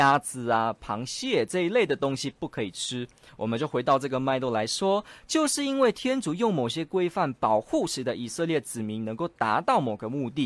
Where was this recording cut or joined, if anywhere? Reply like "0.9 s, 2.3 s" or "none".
3.3 s